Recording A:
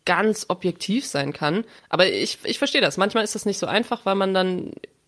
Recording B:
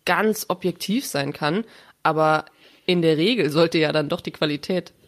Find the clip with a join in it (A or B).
A